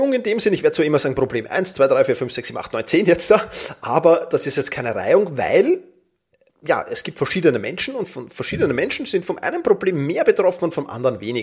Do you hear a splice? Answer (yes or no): no